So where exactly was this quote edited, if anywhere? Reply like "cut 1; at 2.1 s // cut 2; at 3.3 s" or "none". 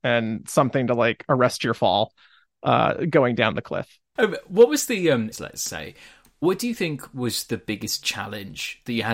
cut 1; at 4.2 s // cut 2; at 5.3 s